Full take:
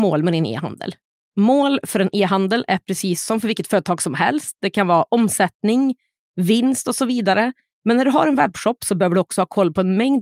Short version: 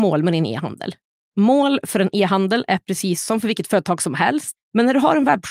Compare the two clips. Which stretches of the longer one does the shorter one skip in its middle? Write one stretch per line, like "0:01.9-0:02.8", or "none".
0:04.6-0:07.7